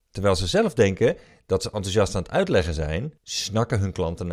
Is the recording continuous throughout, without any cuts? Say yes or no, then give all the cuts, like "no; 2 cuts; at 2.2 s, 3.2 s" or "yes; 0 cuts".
no; 1 cut; at 3.2 s